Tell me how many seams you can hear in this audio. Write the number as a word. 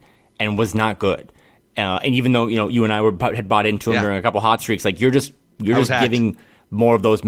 zero